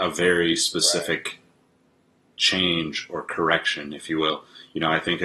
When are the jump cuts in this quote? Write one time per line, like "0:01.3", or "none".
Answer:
none